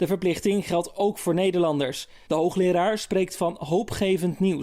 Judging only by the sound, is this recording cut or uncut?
cut